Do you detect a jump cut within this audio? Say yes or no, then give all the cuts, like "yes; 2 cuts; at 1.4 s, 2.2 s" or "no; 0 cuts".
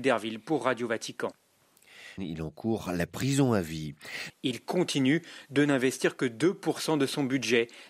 yes; 2 cuts; at 2.2 s, 4.3 s